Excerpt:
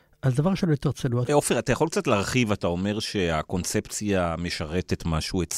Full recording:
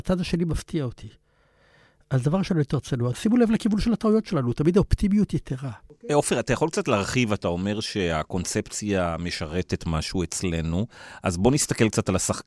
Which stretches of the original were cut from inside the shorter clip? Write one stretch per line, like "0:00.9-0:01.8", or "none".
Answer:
0:03.1-0:06.1